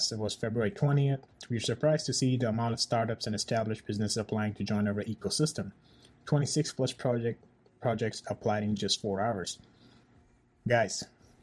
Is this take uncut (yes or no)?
yes